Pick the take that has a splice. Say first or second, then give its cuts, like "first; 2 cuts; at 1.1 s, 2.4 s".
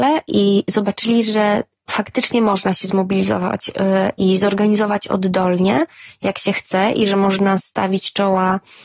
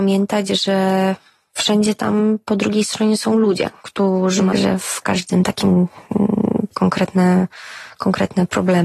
second; 2 cuts; at 4.5 s, 6.7 s